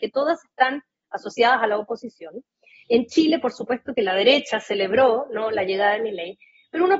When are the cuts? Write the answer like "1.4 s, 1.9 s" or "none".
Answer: none